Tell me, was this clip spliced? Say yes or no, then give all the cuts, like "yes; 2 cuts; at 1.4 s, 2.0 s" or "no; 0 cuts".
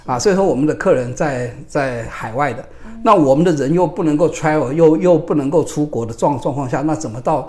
no; 0 cuts